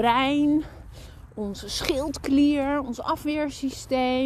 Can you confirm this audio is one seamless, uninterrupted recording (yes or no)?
yes